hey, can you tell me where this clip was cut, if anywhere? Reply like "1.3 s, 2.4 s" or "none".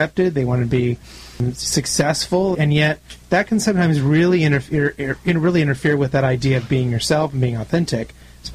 2.5 s